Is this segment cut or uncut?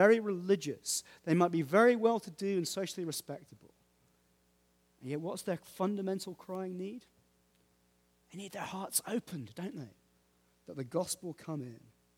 uncut